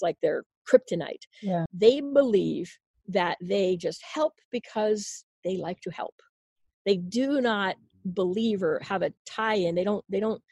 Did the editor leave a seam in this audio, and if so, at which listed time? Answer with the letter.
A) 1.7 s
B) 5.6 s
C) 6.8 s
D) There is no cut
A